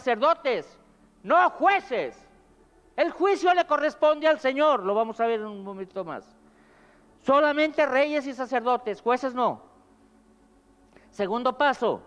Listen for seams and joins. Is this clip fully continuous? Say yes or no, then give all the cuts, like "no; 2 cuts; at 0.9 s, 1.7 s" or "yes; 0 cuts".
yes; 0 cuts